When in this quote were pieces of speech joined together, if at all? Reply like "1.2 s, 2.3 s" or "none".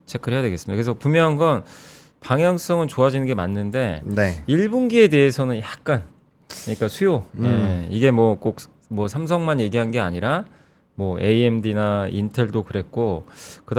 none